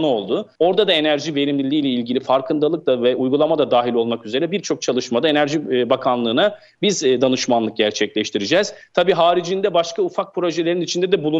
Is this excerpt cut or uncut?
uncut